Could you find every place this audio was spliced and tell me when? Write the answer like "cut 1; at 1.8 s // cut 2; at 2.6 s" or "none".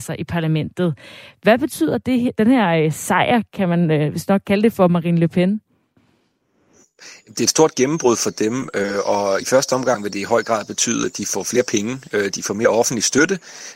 none